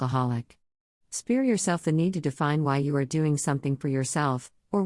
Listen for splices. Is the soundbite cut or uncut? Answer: uncut